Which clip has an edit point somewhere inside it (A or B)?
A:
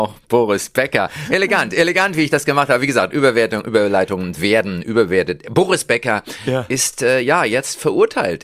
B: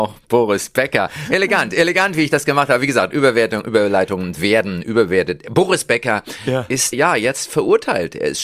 B